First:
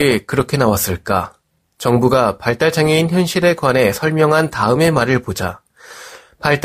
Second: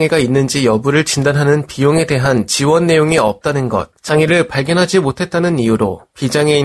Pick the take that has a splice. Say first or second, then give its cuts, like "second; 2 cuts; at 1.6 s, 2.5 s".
second; 1 cut; at 4.0 s